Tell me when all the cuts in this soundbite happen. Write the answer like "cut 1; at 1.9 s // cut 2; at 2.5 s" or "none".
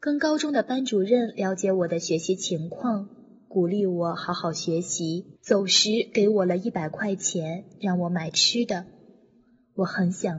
cut 1; at 5.4 s